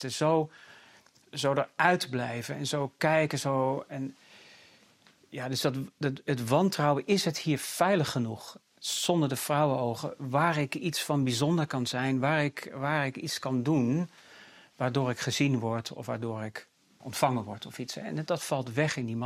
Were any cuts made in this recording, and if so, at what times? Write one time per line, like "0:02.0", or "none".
0:17.0
0:18.3